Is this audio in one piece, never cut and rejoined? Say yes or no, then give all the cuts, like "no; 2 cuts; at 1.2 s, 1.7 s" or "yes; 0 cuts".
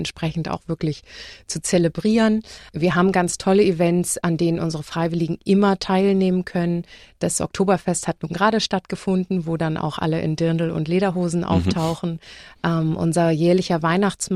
yes; 0 cuts